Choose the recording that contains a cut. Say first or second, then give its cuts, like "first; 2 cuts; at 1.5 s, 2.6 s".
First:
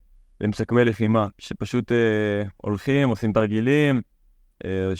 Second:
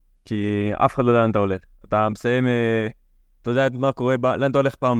first; 1 cut; at 1.3 s